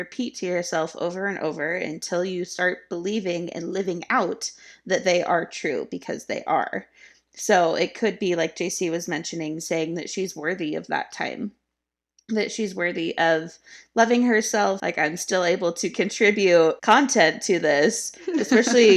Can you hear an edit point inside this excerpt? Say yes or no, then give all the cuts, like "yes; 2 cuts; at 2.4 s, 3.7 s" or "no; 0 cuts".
yes; 2 cuts; at 14.8 s, 16.8 s